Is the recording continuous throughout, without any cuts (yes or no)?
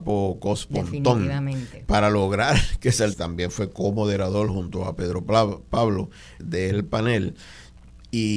no